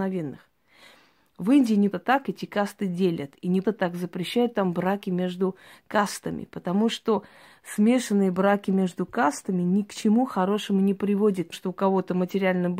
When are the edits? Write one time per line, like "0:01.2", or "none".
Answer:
0:01.9
0:03.6
0:11.5

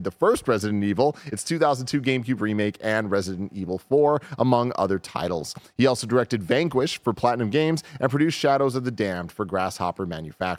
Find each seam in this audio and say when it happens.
none

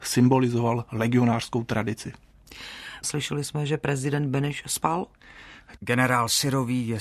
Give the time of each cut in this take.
0:03.0
0:05.8

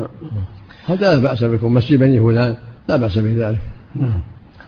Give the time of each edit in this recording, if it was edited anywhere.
0:02.8

